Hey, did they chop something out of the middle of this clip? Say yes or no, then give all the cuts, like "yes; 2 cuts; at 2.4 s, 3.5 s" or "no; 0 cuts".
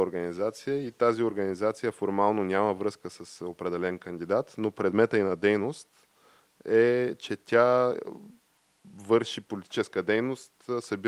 no; 0 cuts